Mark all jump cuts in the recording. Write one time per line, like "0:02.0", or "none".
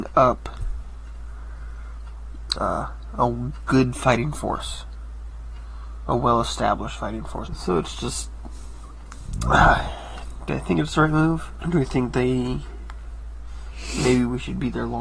0:02.6
0:07.5
0:11.6